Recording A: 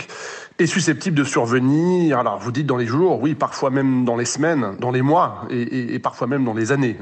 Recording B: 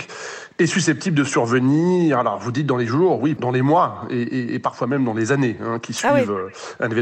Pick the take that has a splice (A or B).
B